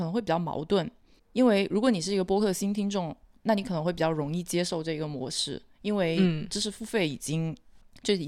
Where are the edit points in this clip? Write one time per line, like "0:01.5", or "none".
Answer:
none